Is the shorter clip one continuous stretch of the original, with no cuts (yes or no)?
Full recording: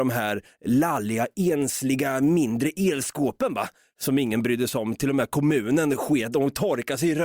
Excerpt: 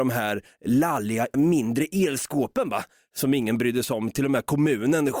no